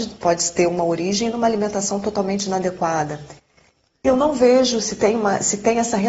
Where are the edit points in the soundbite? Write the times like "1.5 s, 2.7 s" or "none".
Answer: none